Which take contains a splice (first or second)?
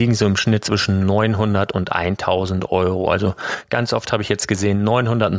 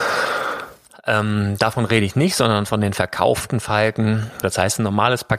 second